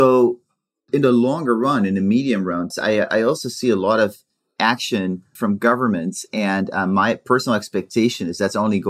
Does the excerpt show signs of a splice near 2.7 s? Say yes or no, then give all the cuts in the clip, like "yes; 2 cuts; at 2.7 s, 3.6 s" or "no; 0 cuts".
yes; 2 cuts; at 2.7 s, 5.4 s